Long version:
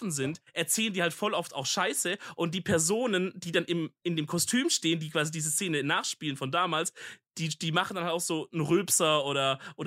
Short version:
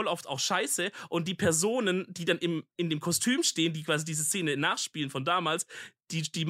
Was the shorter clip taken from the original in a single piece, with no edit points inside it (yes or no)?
yes